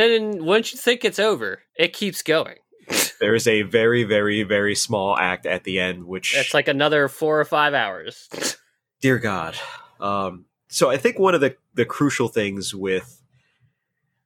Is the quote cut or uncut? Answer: cut